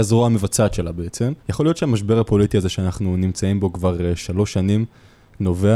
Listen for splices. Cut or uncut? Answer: cut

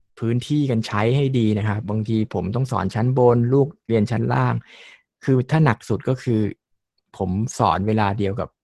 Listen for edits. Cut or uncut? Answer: cut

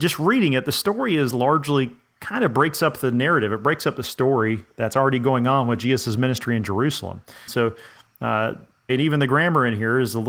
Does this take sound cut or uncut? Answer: cut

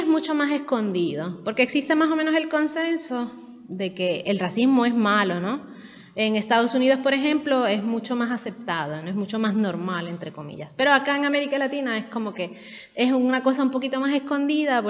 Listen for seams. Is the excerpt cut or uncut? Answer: uncut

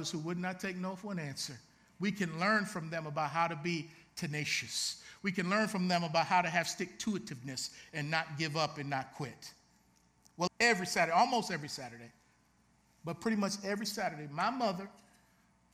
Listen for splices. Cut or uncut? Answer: cut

